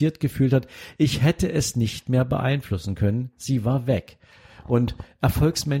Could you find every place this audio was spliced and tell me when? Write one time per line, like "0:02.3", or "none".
none